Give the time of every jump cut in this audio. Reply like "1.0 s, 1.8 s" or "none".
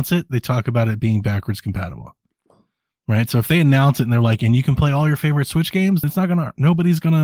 6.0 s